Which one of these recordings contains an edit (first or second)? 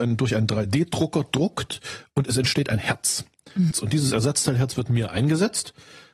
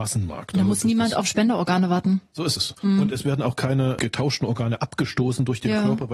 first